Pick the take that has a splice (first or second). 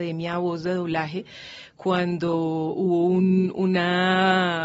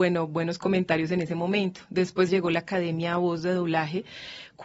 second